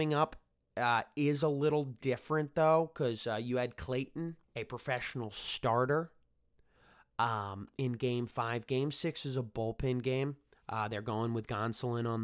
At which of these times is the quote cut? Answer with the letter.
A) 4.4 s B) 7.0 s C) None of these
A